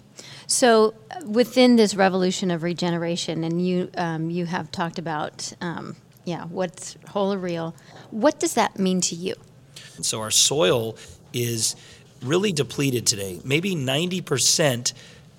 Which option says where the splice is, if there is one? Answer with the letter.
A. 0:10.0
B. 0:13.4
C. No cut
A